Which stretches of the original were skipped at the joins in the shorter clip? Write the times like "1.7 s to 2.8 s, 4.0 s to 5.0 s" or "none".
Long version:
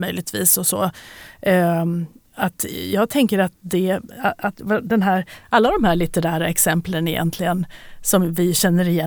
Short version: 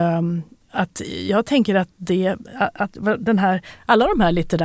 none